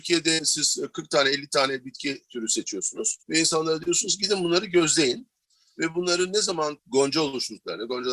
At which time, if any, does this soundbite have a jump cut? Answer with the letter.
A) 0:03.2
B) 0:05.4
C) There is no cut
A